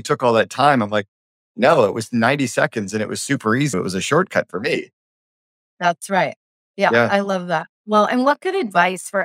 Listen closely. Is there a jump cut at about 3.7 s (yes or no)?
yes